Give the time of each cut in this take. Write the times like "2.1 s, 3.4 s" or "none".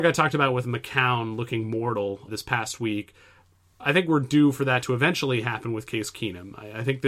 2.3 s